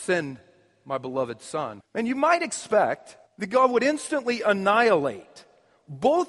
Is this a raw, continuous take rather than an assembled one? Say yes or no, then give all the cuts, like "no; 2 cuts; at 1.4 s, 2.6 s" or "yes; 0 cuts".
no; 2 cuts; at 1.8 s, 3.3 s